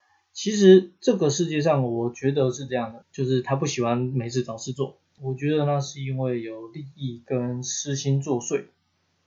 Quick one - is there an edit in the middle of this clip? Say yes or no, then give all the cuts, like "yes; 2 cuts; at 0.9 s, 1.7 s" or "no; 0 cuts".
yes; 2 cuts; at 3.0 s, 5.2 s